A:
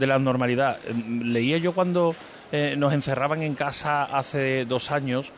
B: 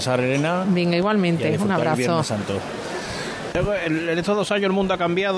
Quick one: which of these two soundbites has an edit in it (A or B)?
B